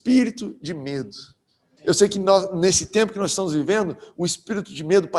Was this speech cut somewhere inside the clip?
yes; 1 cut; at 1.8 s

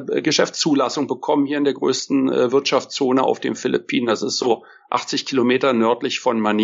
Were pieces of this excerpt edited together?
no; 0 cuts

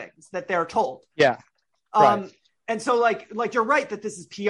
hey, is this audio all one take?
yes; 0 cuts

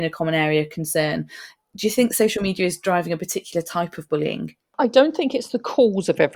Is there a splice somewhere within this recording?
no; 0 cuts

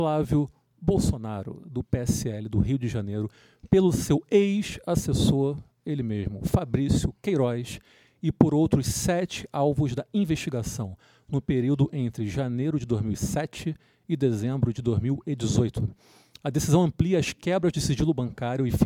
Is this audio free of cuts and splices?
yes; 0 cuts

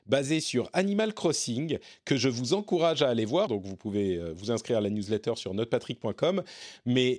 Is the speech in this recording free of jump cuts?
no; 1 cut; at 3.5 s

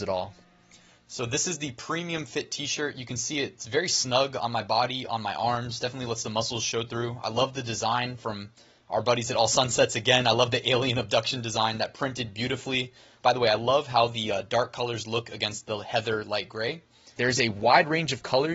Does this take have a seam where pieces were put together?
yes; 2 cuts; at 13.2 s, 17.2 s

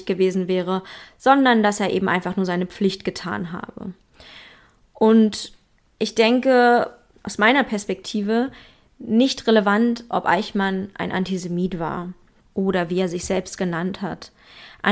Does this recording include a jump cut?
yes; 1 cut; at 7.1 s

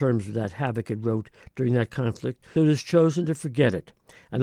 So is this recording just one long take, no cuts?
no; 1 cut; at 2.6 s

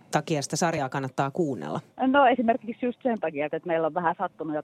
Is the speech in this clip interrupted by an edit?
yes; 2 cuts; at 1.9 s, 3.5 s

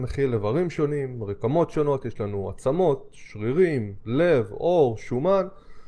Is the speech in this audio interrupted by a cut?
no; 0 cuts

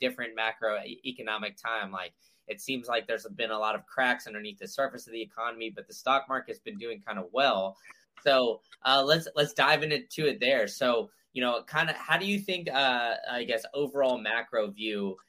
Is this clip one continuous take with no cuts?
yes; 0 cuts

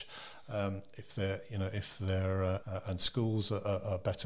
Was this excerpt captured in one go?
no; 1 cut; at 2.6 s

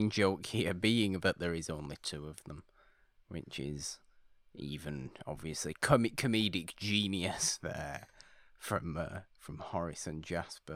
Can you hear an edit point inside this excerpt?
no; 0 cuts

